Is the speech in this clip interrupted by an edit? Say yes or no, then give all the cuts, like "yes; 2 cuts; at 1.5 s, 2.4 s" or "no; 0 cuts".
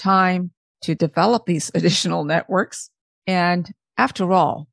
no; 0 cuts